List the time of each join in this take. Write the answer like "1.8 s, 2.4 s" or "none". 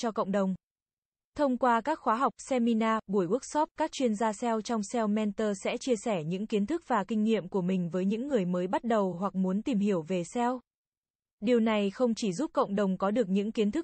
none